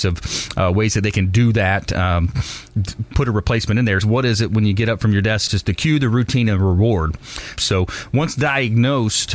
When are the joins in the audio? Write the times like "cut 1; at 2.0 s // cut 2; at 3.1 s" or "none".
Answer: cut 1; at 4.0 s // cut 2; at 5.5 s // cut 3; at 7.6 s